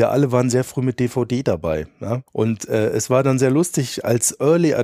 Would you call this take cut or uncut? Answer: cut